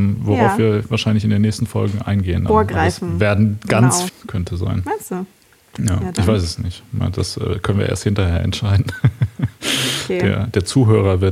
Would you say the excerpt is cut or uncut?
cut